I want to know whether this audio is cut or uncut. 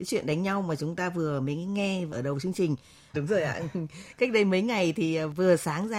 cut